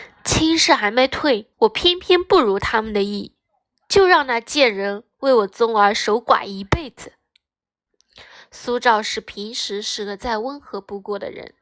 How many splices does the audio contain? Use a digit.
1